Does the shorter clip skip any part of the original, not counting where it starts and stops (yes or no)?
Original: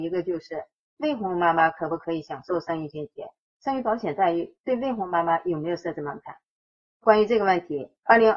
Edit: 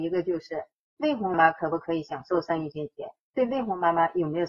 yes